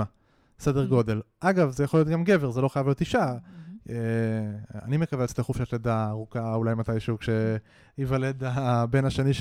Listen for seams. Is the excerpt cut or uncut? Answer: uncut